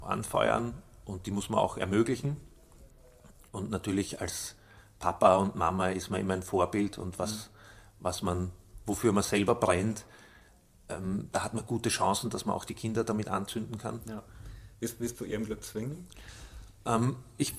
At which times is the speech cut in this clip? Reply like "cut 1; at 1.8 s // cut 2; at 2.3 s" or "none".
cut 1; at 15.1 s

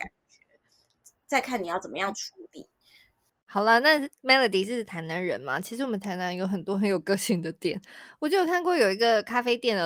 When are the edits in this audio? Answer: none

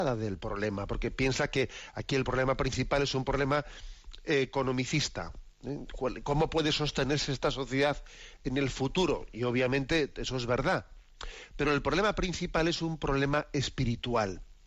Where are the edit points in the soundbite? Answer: none

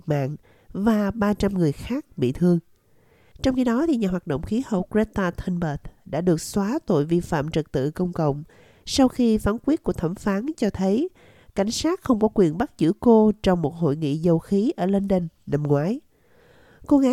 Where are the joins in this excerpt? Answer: cut 1; at 3.3 s

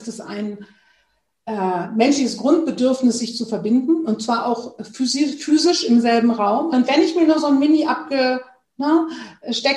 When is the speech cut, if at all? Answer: cut 1; at 6.7 s

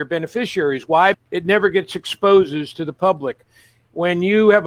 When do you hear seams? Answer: cut 1; at 1.1 s

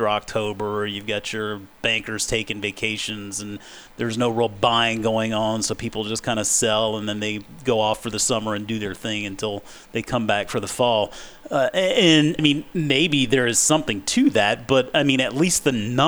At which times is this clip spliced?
cut 1; at 12.4 s

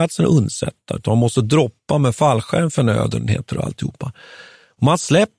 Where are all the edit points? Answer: none

